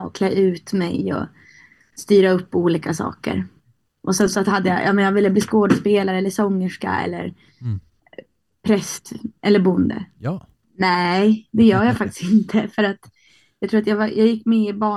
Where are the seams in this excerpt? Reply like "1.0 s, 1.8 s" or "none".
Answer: 10.6 s